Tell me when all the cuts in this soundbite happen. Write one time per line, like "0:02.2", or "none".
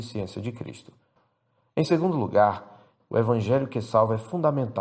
0:03.0

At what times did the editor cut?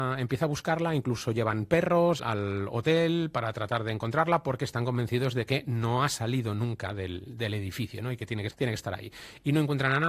0:02.2
0:08.5

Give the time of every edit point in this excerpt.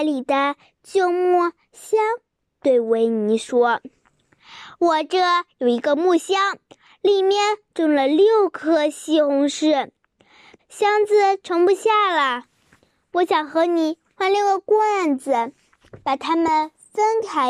0:10.6

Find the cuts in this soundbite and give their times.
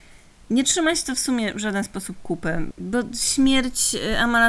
0:02.7

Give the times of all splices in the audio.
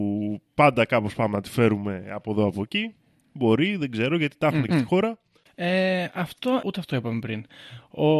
0:04.7
0:06.6

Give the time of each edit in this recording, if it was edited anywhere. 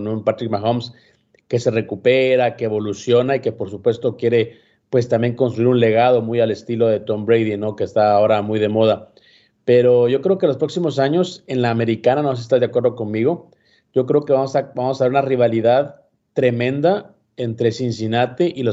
none

